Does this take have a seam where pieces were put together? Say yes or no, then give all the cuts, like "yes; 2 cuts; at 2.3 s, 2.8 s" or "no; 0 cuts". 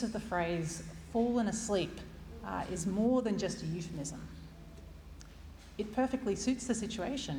no; 0 cuts